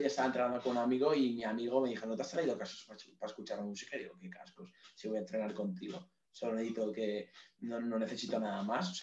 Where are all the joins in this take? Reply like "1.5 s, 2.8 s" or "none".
none

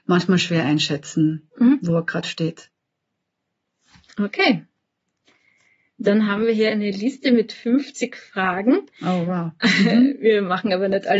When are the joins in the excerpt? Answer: none

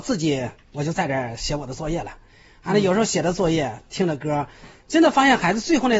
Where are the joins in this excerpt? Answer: none

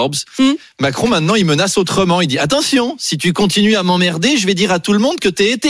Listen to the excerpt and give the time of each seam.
none

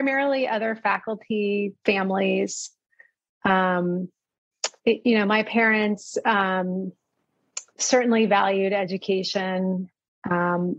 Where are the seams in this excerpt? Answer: 4.8 s, 7.7 s

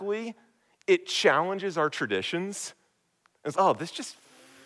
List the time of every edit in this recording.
3.5 s

